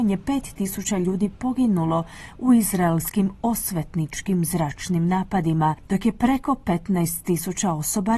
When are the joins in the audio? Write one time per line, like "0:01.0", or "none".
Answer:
0:05.9